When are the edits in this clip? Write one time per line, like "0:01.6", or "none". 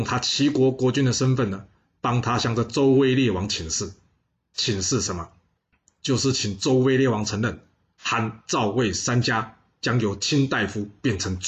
none